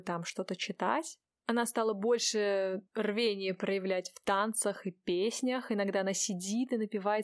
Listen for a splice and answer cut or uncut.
uncut